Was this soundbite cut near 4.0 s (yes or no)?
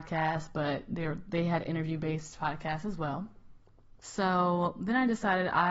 yes